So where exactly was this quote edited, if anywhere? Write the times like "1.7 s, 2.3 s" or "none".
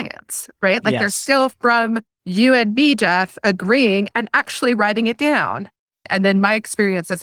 none

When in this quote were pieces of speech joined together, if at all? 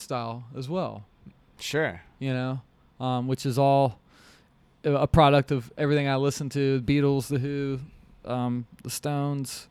none

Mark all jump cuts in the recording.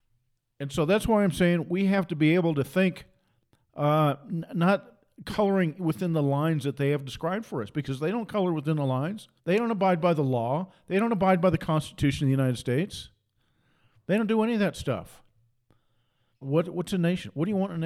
9.4 s, 16.4 s

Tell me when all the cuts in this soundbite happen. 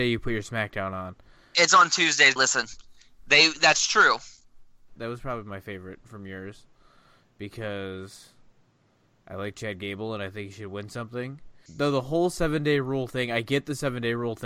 2.4 s, 5.0 s, 11.7 s

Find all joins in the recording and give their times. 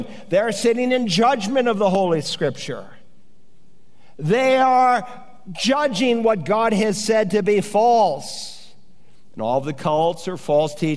9.3 s

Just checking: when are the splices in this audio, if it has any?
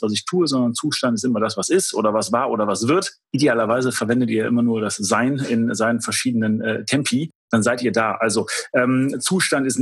3.2 s

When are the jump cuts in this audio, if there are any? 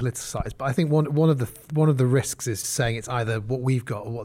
2.6 s

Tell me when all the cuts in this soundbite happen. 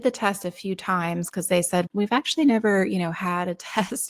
1.9 s

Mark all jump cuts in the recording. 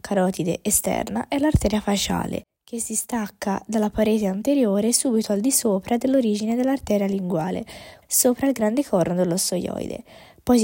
8.0 s

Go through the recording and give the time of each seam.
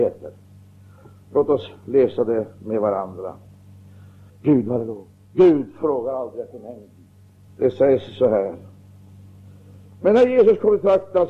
4.3 s, 7.5 s

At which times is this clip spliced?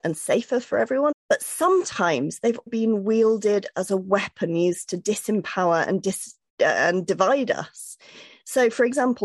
1.1 s, 2.7 s

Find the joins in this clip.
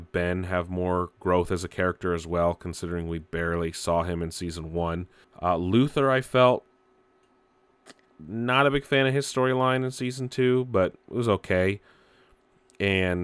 5.2 s

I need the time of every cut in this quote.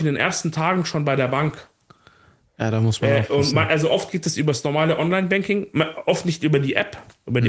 none

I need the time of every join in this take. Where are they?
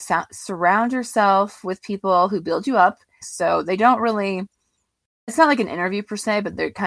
3.2 s, 5.3 s

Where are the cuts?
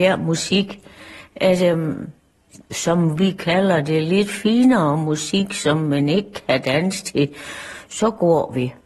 none

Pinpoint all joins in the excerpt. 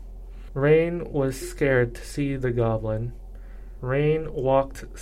1.4 s

